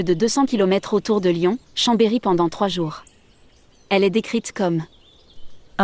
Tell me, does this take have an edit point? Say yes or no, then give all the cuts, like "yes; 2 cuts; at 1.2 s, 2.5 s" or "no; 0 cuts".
yes; 1 cut; at 1.6 s